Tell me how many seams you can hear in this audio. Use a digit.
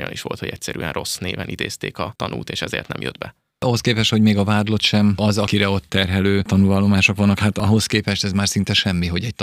0